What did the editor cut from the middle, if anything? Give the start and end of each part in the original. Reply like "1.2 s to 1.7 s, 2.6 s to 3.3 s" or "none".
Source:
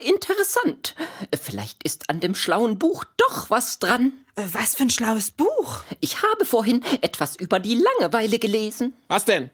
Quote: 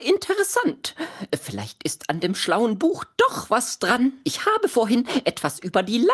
4.2 s to 6.0 s